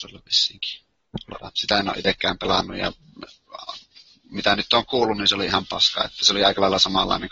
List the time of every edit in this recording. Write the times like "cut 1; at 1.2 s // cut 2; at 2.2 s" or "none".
cut 1; at 1.5 s